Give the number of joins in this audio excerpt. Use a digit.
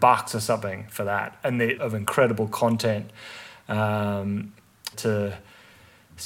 2